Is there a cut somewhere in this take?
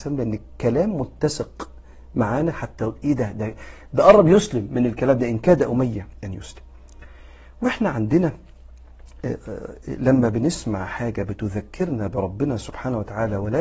no; 0 cuts

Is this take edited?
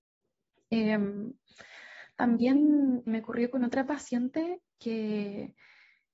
yes; 1 cut; at 3.1 s

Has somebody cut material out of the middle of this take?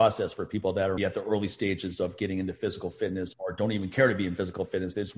yes; 2 cuts; at 1.0 s, 3.3 s

